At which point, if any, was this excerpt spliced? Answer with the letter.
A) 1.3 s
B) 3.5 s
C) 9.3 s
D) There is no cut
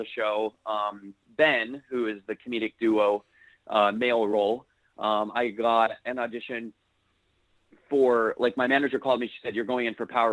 D